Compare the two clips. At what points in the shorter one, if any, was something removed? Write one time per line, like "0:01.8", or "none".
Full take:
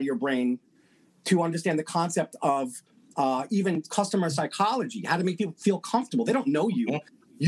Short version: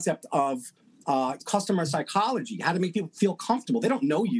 0:01.4

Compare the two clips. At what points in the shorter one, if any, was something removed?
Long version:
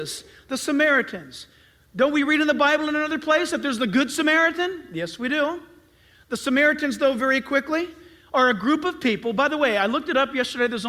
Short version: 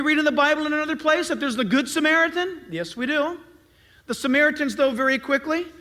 none

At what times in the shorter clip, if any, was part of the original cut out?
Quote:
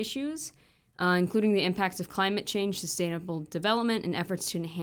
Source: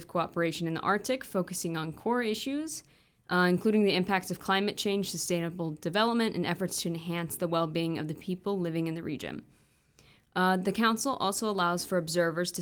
none

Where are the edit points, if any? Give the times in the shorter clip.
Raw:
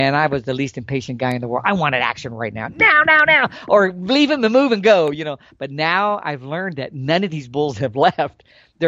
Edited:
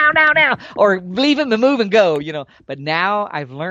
none

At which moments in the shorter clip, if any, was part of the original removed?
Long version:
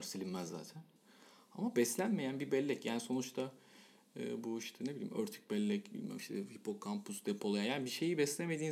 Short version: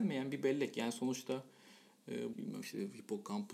0:02.3

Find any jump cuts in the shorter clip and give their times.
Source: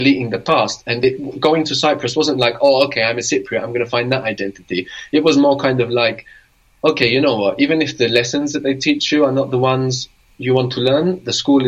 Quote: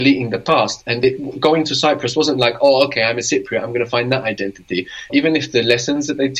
0:05.1

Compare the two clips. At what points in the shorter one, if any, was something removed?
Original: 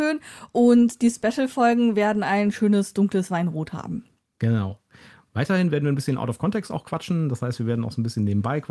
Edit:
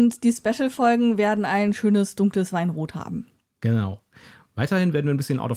none

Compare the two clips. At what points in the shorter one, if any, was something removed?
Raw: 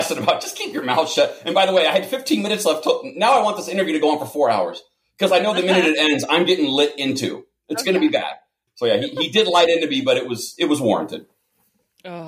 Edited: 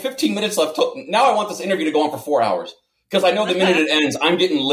none

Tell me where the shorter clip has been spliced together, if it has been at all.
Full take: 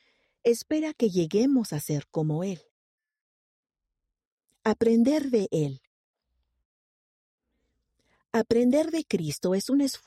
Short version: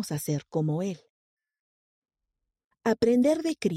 0:02.7

